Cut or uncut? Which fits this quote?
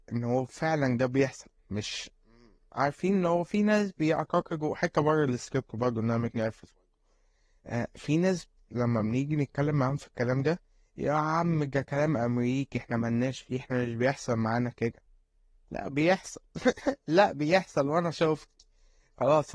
uncut